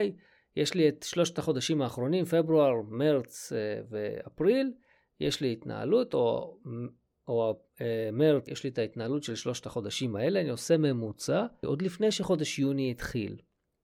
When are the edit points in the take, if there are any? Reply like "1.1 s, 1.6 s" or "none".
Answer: 8.5 s, 11.6 s